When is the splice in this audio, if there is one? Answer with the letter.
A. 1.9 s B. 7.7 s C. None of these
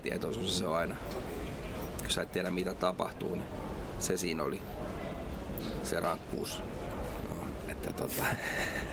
B